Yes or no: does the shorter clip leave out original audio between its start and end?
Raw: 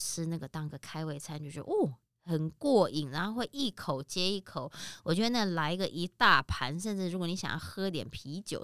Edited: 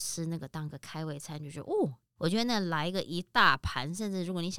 yes